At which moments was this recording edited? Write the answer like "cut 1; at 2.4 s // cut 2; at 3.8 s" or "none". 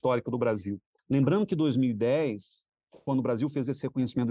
cut 1; at 1.0 s